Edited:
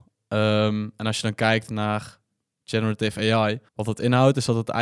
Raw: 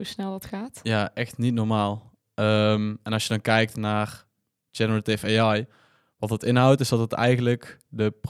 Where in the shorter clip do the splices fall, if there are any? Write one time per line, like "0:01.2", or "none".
0:03.7